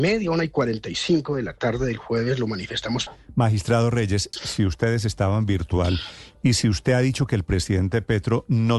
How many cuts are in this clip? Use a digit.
2